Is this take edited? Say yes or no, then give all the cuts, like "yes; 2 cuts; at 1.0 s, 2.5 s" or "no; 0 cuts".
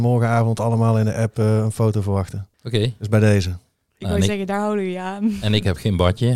yes; 1 cut; at 2.5 s